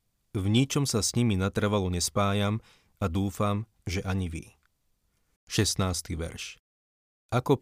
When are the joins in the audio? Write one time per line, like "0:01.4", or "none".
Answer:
0:05.4